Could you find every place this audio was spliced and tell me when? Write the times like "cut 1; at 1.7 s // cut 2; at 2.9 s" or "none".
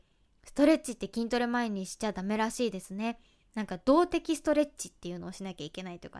none